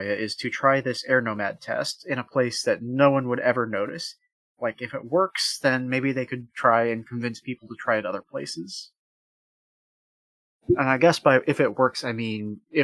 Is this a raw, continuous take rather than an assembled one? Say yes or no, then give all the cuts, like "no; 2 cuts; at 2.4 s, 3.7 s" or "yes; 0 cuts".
yes; 0 cuts